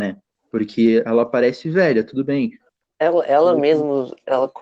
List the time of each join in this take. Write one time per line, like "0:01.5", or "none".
0:02.8